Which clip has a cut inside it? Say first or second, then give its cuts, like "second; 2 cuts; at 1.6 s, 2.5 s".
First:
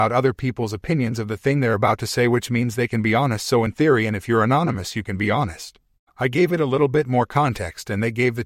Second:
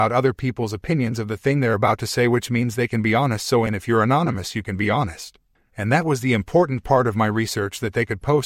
second; 2 cuts; at 3.7 s, 5.6 s